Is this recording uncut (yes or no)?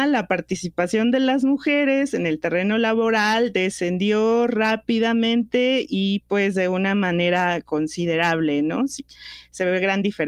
yes